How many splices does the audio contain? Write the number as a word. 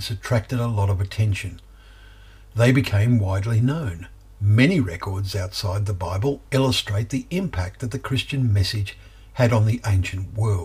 zero